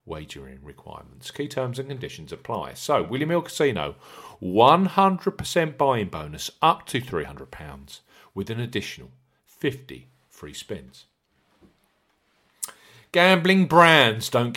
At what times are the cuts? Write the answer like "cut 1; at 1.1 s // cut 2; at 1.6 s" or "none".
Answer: none